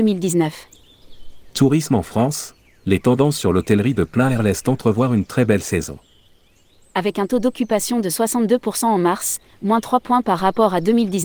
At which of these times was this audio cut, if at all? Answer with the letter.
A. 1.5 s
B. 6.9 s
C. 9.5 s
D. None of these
D